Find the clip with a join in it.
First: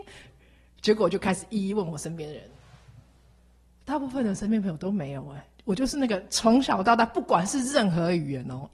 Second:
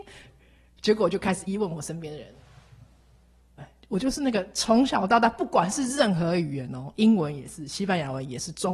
second; 2 cuts; at 1.5 s, 3.6 s

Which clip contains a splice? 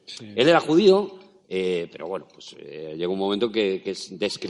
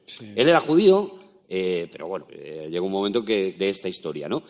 second; 2 cuts; at 2.3 s, 3.6 s

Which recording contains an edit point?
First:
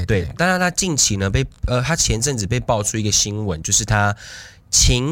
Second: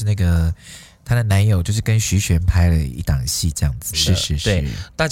second; 1 cut; at 3.9 s

